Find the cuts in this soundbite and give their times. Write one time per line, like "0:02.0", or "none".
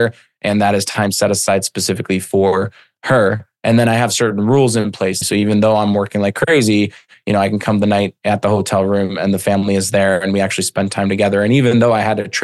0:05.2